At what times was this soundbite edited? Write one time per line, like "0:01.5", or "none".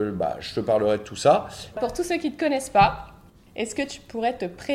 0:01.7